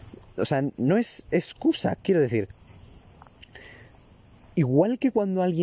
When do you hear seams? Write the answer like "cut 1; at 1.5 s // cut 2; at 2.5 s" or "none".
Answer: none